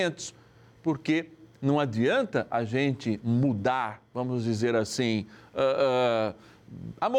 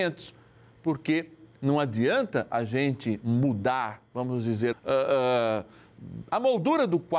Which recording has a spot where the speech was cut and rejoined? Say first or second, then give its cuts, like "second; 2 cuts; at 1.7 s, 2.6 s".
second; 1 cut; at 4.7 s